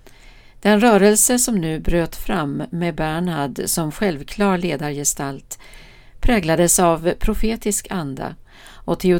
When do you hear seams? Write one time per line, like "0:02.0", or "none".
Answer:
none